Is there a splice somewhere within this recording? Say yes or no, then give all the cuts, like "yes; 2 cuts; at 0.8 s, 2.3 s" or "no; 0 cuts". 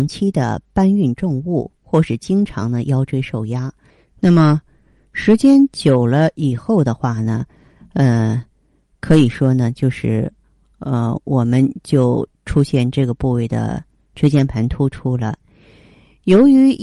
no; 0 cuts